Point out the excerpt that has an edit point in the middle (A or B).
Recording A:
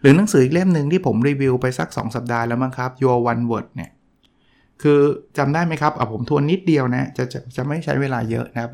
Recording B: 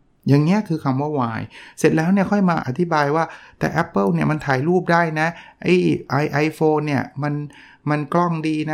B